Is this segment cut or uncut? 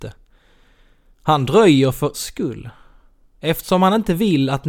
cut